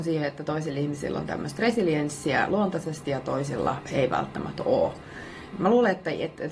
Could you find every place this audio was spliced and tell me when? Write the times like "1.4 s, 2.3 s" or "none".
5.5 s